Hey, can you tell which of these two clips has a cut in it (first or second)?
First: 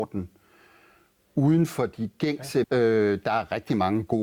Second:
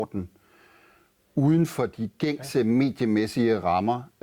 first